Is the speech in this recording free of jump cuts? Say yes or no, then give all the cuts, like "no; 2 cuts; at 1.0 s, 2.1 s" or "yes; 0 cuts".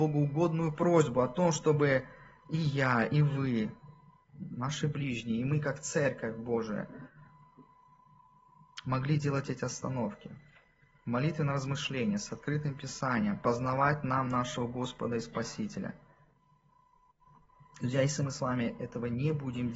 yes; 0 cuts